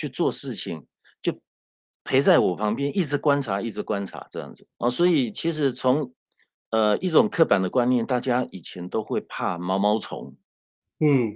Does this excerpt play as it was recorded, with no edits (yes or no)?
no